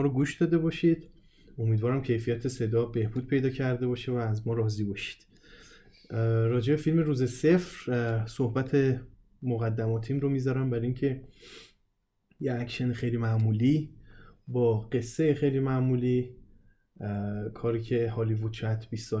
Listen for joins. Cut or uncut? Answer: uncut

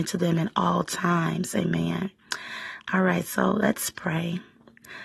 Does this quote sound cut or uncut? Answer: uncut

